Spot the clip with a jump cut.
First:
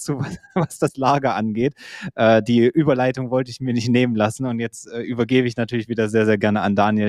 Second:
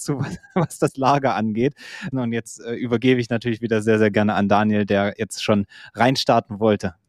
second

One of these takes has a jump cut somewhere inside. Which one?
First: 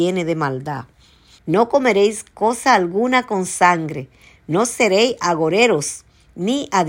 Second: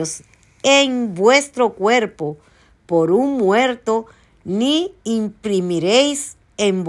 first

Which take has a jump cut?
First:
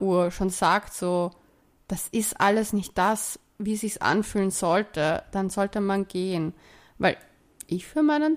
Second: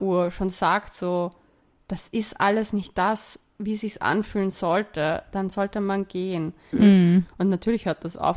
second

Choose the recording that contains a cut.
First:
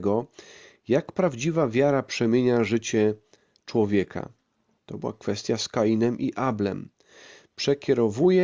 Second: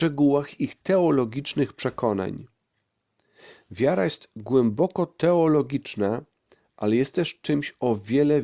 first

